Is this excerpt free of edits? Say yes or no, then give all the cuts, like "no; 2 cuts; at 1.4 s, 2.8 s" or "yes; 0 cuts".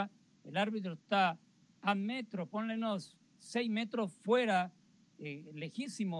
yes; 0 cuts